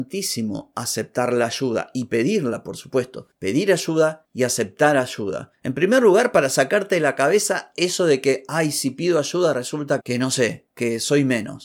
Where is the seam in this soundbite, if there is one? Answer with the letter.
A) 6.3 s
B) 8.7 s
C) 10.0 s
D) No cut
C